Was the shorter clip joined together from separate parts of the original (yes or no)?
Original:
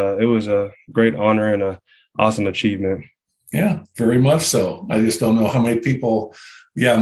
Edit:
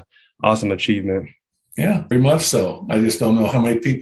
yes